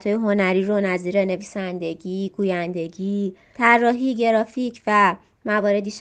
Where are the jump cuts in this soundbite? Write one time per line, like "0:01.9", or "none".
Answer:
none

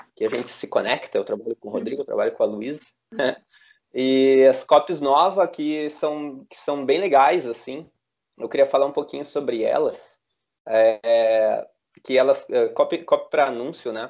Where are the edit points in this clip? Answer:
none

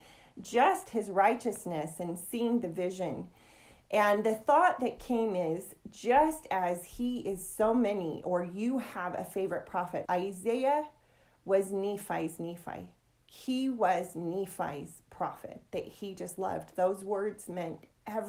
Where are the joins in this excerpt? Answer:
0:10.0

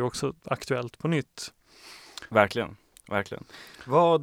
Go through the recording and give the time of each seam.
0:02.3

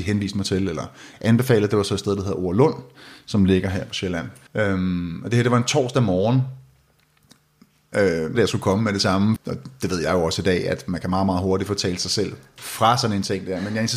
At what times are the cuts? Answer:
0:04.5
0:08.3
0:09.4

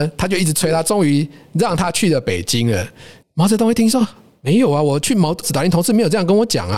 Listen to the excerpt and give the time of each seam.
0:03.2
0:05.4

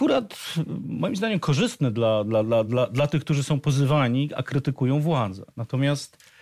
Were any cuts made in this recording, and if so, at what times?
none

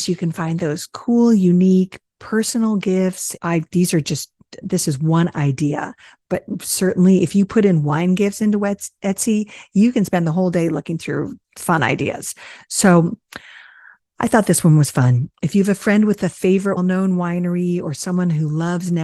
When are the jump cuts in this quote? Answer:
0:03.4
0:04.6
0:16.8

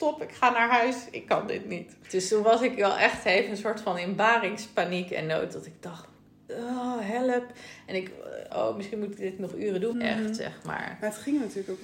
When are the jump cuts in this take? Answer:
0:08.5
0:09.9

